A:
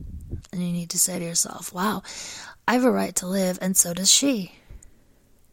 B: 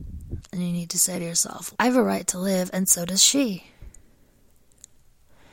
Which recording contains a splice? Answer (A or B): B